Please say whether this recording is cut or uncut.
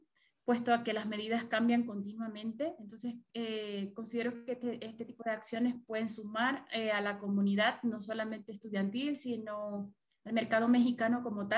uncut